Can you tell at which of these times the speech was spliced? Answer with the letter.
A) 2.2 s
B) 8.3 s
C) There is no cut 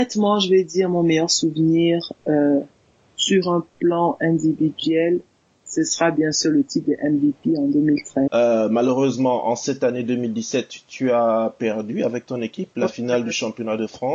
B